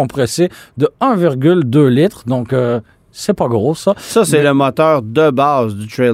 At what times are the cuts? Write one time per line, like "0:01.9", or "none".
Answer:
none